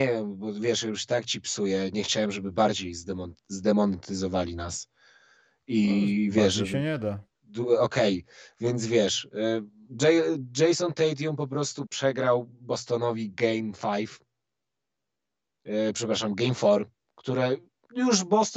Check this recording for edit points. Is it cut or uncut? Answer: cut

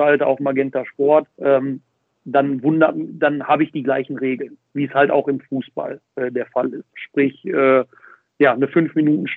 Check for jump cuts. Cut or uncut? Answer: cut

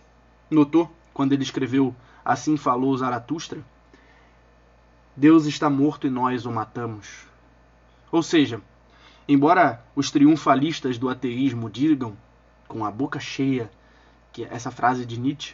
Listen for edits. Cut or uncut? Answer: uncut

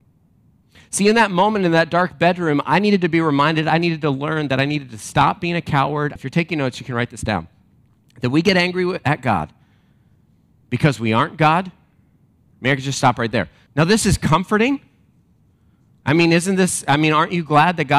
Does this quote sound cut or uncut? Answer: cut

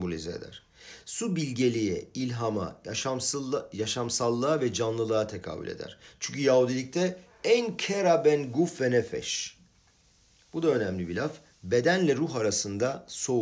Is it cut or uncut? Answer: uncut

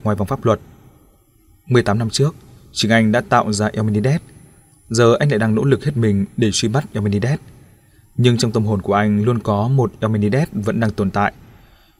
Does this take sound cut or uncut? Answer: uncut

